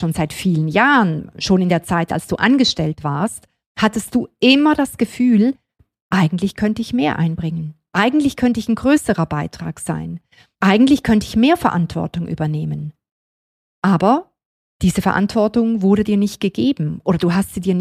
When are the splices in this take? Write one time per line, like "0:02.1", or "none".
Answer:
none